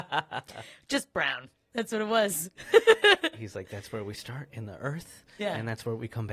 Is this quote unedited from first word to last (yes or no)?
yes